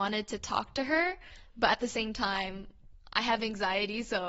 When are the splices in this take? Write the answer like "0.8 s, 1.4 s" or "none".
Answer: none